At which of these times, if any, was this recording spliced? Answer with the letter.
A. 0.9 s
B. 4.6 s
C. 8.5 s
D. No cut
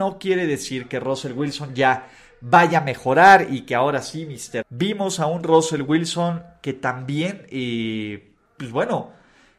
B